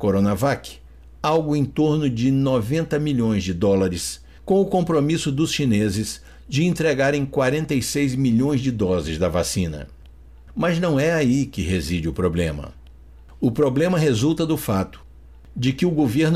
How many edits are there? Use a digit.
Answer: 1